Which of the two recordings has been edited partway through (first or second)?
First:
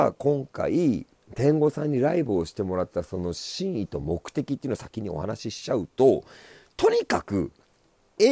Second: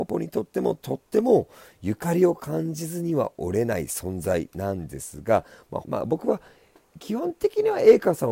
second